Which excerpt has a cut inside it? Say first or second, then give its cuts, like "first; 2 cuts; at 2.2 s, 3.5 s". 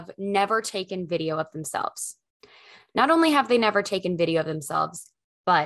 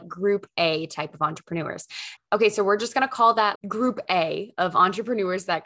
second; 2 cuts; at 2.2 s, 3.6 s